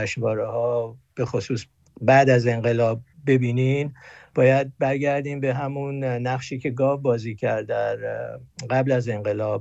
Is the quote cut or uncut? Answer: uncut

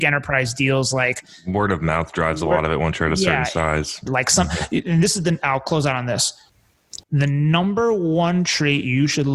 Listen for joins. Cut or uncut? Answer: cut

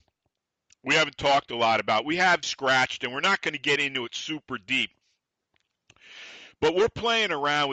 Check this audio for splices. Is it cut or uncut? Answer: cut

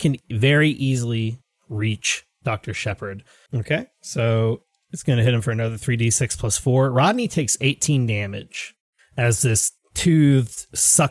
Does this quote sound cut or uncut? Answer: cut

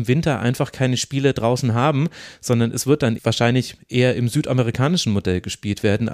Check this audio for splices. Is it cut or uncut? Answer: cut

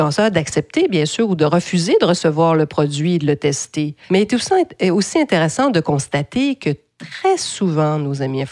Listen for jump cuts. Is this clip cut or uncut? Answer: cut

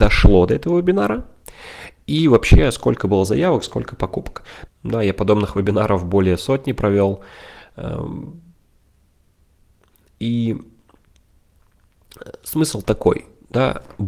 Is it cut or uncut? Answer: cut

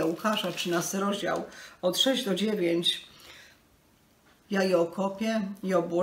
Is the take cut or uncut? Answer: cut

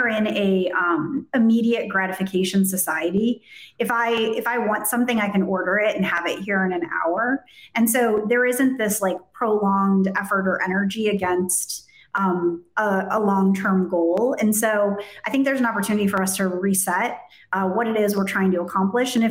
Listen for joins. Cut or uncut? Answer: uncut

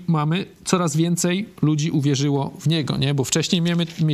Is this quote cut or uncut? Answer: uncut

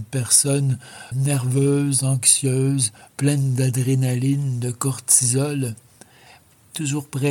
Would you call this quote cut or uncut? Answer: cut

